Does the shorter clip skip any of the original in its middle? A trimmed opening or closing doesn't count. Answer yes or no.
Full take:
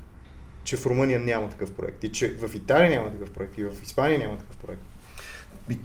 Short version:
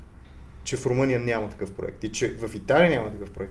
no